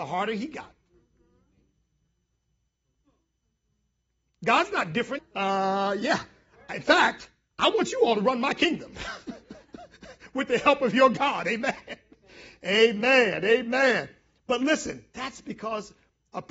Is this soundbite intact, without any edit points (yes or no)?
no